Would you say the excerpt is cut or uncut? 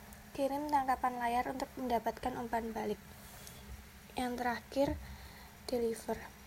uncut